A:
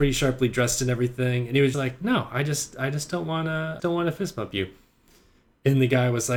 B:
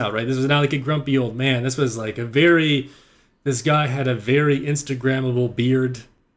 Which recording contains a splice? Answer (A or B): A